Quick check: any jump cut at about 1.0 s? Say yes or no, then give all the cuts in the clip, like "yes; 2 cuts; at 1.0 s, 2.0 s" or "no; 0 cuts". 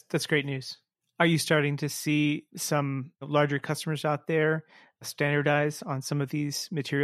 yes; 2 cuts; at 1.0 s, 3.1 s